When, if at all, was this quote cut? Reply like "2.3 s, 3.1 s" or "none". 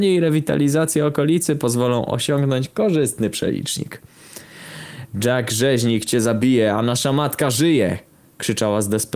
none